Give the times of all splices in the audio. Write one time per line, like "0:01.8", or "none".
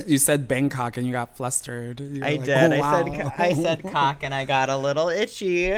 none